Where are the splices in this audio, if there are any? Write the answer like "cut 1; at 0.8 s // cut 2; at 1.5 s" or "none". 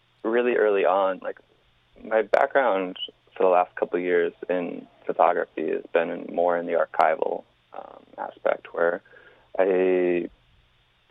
none